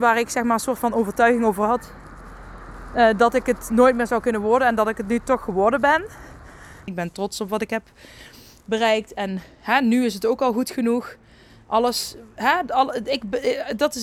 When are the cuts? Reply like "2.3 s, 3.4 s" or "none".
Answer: 6.9 s